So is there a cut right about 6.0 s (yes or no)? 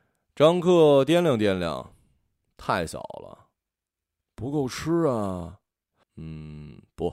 yes